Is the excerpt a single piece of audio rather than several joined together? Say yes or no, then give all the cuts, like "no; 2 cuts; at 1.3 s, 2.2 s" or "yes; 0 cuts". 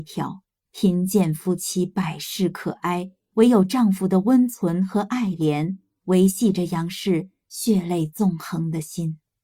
yes; 0 cuts